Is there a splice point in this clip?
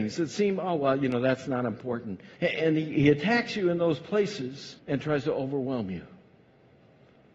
yes; 2 cuts; at 2.4 s, 4.8 s

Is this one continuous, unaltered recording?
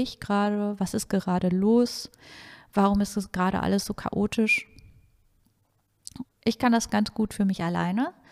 no; 1 cut; at 6.2 s

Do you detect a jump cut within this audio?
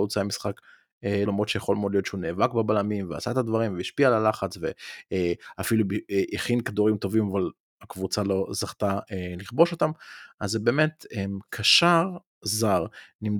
yes; 1 cut; at 1.3 s

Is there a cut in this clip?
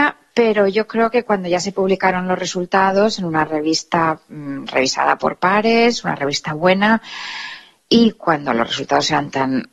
no; 0 cuts

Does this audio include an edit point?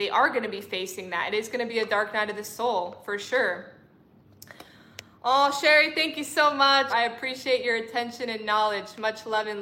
yes; 1 cut; at 6.9 s

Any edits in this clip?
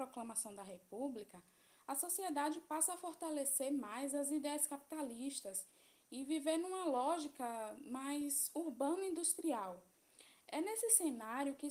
no; 0 cuts

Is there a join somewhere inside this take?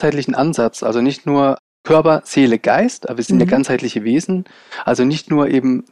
no; 0 cuts

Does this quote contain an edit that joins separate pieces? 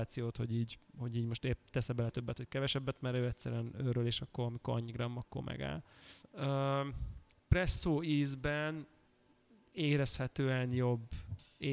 yes; 1 cut; at 6.2 s

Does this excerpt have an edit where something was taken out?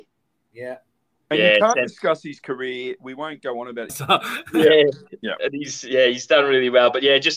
yes; 1 cut; at 3.9 s

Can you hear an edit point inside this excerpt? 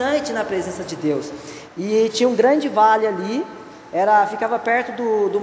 yes; 1 cut; at 1.7 s

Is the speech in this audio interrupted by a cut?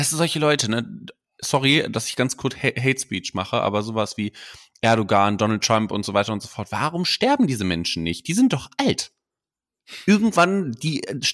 no; 0 cuts

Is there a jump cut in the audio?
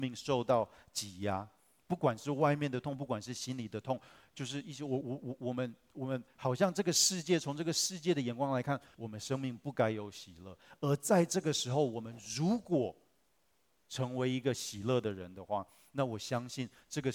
yes; 2 cuts; at 5.0 s, 8.9 s

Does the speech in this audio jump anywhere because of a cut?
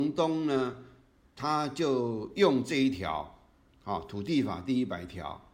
no; 0 cuts

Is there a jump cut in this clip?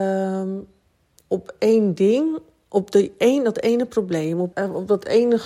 yes; 1 cut; at 4.5 s

